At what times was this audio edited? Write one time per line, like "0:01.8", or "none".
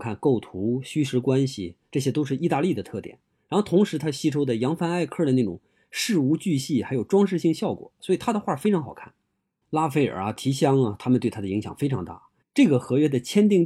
0:01.9
0:09.6
0:12.4